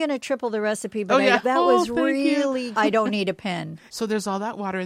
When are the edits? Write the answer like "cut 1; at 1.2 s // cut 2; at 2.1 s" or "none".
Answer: cut 1; at 1.4 s // cut 2; at 2.7 s // cut 3; at 3.9 s